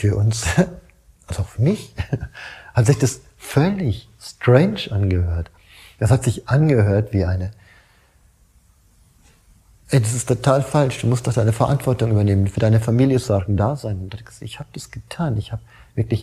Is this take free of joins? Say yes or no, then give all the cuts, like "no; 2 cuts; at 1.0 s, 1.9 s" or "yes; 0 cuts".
yes; 0 cuts